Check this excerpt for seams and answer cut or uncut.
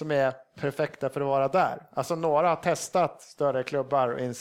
uncut